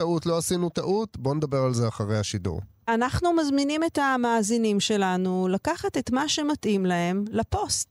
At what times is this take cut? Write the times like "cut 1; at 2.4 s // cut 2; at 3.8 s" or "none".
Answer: none

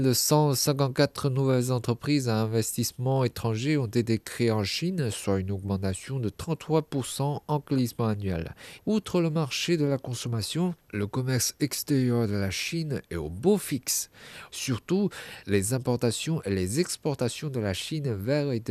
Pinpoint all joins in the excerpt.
cut 1; at 8.8 s // cut 2; at 14.5 s

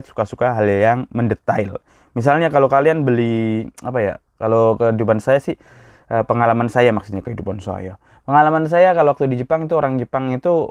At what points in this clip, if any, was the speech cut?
none

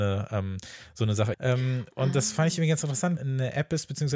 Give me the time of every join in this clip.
cut 1; at 1.3 s // cut 2; at 3.2 s

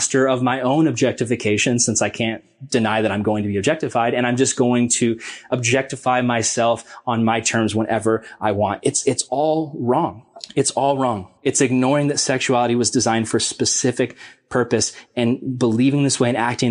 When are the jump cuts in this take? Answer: none

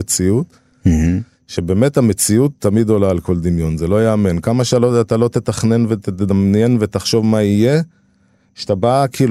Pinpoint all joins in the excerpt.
none

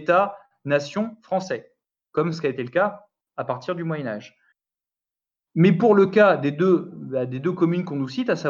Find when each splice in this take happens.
none

